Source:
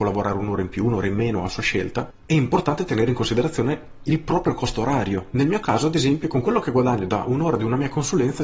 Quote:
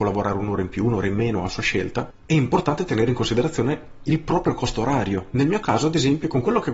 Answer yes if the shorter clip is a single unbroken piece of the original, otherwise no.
yes